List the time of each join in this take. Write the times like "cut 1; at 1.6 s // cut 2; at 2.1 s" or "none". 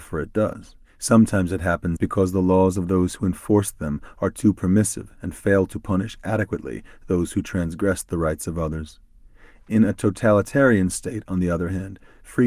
cut 1; at 2.0 s